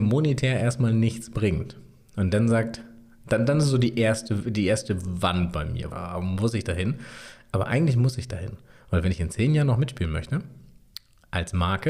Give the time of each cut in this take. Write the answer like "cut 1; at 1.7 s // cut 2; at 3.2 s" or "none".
cut 1; at 5.9 s